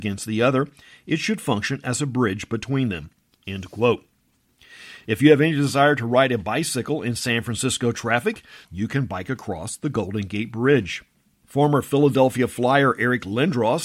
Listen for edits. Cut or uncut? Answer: cut